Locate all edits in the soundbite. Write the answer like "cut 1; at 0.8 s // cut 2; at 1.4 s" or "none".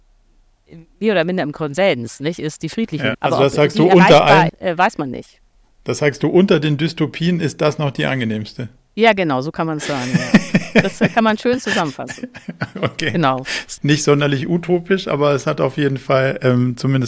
cut 1; at 3.1 s // cut 2; at 4.5 s // cut 3; at 13.8 s